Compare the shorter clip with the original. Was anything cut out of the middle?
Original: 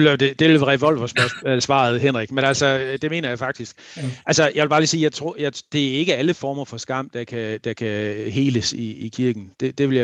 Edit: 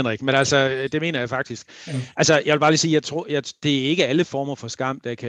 no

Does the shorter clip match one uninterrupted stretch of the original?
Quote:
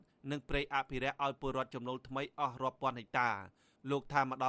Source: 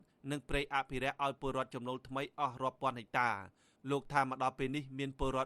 yes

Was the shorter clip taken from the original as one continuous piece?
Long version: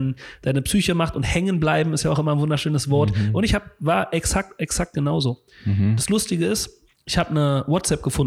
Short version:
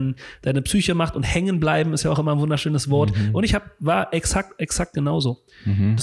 yes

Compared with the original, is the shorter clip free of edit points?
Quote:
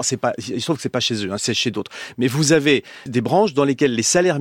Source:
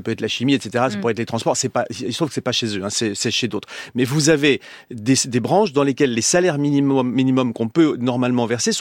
no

